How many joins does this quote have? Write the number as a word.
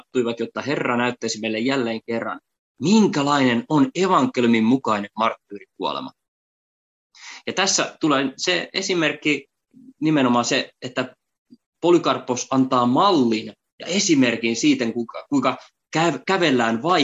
zero